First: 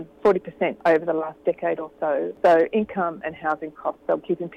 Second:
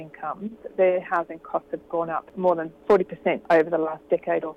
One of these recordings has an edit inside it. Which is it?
first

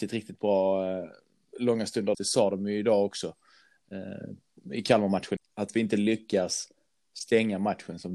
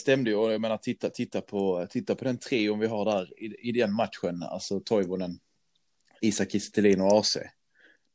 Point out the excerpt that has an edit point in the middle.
first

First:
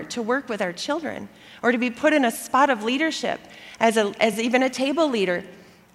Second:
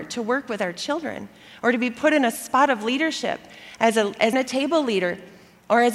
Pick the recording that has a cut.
second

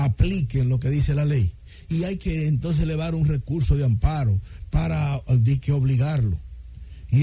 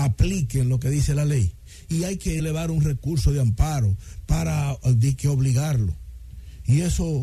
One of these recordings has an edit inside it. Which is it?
second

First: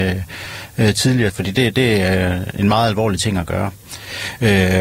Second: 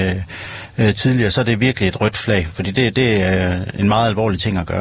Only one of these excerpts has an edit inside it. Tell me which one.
first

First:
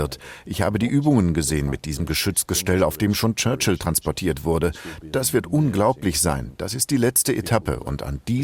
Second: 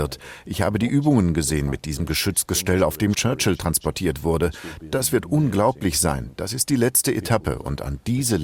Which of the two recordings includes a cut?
second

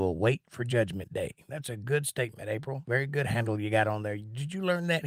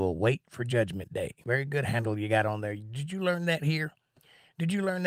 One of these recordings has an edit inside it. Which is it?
second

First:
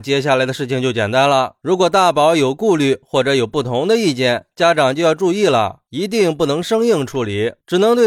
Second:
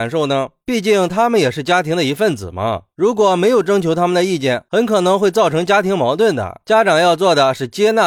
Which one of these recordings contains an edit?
second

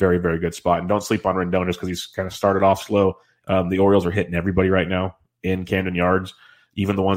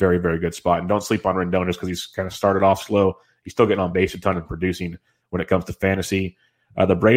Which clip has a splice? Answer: first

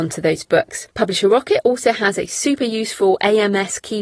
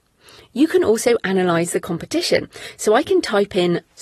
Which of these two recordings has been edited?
first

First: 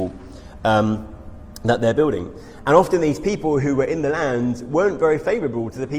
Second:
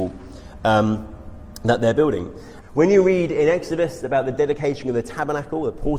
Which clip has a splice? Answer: second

